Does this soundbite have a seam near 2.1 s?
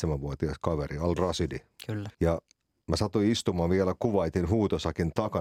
yes; 1 cut; at 2.1 s

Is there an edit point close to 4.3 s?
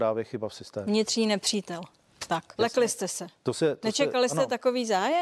no; 1 cut; at 2.6 s

